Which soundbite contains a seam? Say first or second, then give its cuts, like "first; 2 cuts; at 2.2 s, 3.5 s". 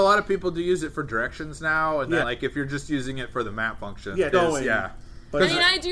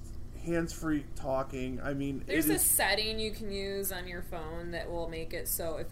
first; 2 cuts; at 2.2 s, 4.3 s